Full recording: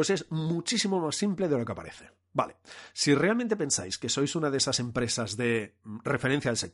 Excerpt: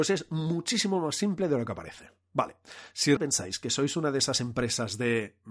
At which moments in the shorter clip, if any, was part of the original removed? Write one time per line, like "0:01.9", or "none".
0:03.2